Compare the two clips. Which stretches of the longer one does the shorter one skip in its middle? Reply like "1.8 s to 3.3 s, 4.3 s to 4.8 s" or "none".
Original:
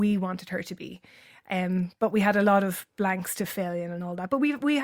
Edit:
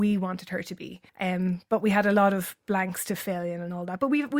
1.1 s to 1.4 s